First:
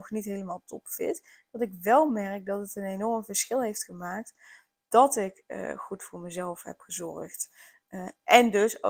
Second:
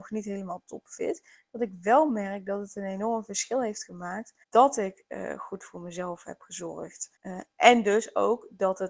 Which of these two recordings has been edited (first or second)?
second